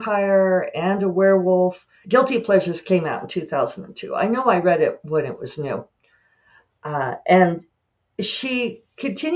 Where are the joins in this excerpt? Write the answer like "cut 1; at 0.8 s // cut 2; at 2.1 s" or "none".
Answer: cut 1; at 2.0 s